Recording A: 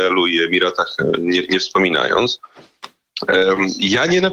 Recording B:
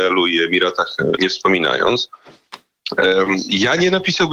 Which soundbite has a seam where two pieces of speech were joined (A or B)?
B